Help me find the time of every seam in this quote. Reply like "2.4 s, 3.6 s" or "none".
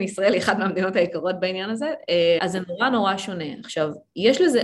2.4 s